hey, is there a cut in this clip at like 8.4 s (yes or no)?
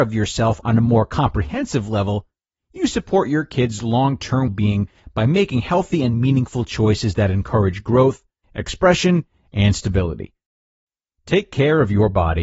yes